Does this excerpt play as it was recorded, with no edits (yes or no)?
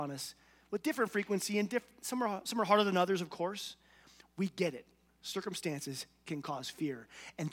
yes